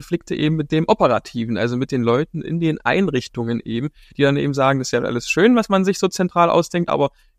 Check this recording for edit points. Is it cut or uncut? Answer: uncut